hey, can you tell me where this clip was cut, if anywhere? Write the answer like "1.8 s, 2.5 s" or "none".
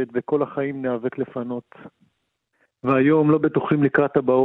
2.7 s